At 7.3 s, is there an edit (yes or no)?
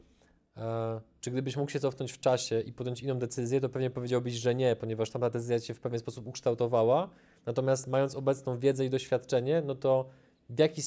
no